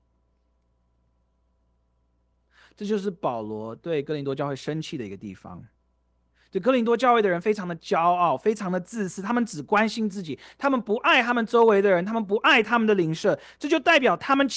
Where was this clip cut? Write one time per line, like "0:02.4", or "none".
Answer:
none